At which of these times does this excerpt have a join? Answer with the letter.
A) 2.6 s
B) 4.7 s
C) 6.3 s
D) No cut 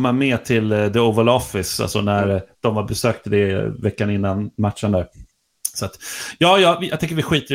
D